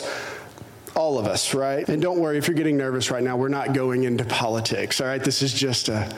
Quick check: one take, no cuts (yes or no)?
no